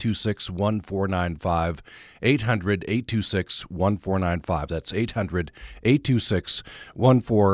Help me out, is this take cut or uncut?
uncut